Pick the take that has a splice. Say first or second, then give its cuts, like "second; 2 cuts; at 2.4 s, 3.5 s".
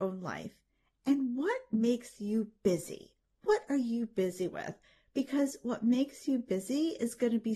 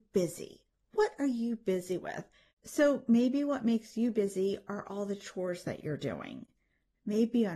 second; 1 cut; at 2.5 s